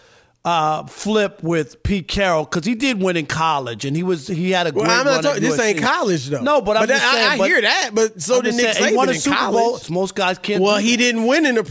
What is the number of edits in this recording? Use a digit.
1